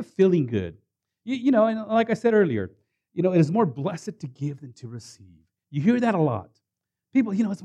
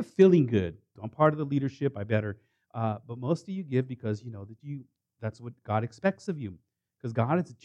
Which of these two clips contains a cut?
second; 1 cut; at 1.0 s

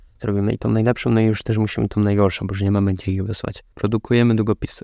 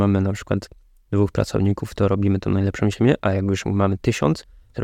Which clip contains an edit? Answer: first; 1 cut; at 3.7 s

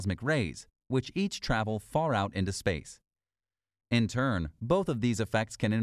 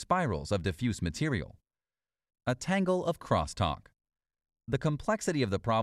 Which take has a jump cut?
second; 1 cut; at 2.3 s

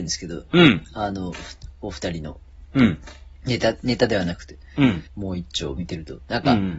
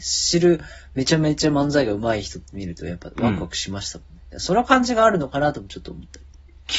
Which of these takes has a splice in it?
first; 1 cut; at 5.1 s

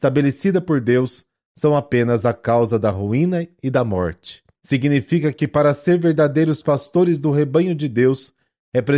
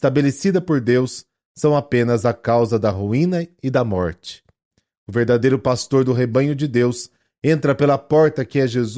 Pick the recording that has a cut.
first; 1 cut; at 4.6 s

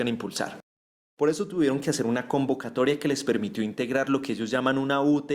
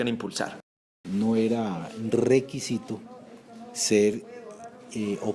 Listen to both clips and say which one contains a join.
second; 1 cut; at 1.0 s

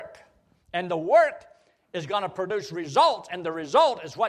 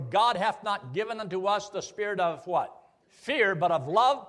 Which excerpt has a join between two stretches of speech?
second; 1 cut; at 3.0 s

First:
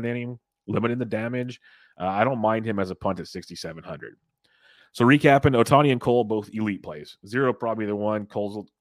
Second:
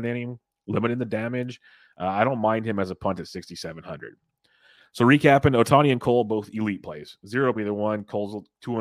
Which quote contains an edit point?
second; 1 cut; at 7.5 s

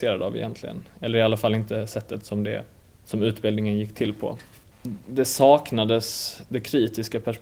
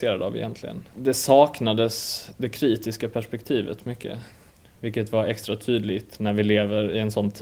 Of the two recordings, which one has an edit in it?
second; 1 cut; at 0.9 s

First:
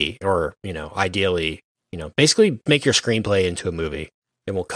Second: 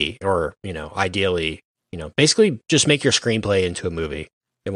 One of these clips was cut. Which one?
first; 1 cut; at 2.7 s

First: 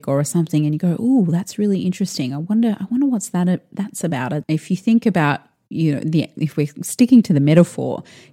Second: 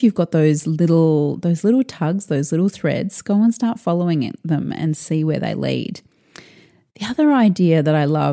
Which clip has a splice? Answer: first; 1 cut; at 4.4 s

